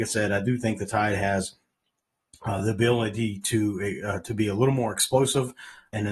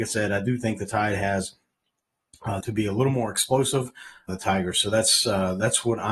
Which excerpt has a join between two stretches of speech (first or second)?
second